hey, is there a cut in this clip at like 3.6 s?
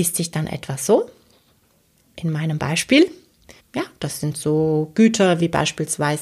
yes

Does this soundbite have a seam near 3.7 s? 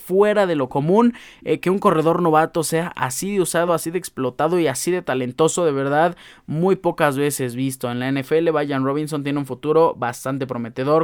no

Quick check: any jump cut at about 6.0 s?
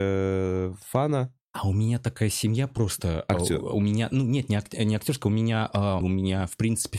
yes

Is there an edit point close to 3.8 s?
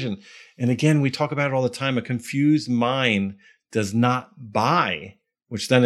no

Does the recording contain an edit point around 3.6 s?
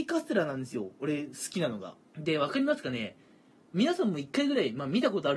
no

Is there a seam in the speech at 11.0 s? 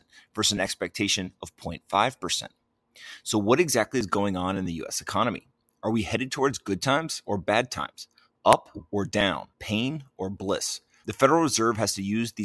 yes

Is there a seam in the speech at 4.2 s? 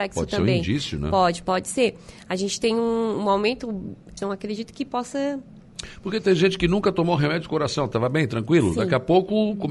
yes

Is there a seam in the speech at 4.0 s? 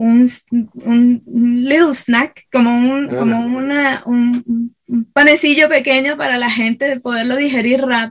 no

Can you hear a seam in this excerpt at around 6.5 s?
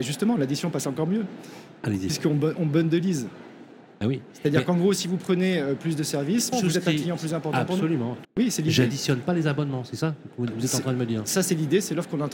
yes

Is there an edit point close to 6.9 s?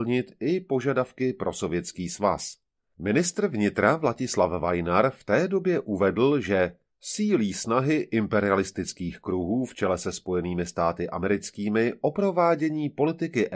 yes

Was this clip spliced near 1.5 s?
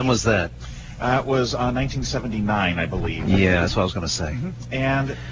no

